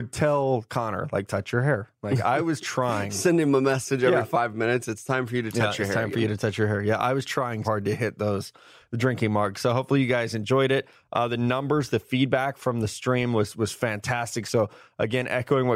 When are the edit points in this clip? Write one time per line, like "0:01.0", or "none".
0:07.6